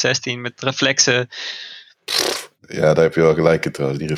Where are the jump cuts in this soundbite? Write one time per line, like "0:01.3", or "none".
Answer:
0:02.6